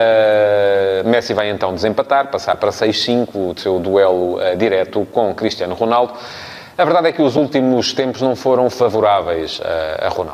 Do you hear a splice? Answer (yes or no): no